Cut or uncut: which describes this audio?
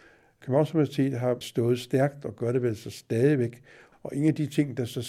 cut